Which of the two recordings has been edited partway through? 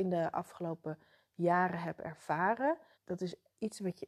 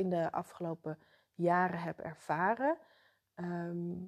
first; 1 cut; at 2.9 s

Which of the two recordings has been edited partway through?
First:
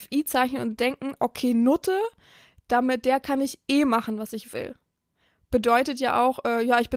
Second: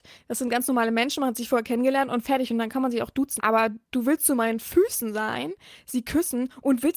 second; 1 cut; at 3.4 s

